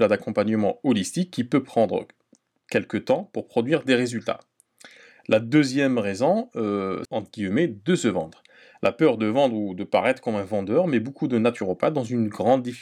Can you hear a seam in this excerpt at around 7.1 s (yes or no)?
yes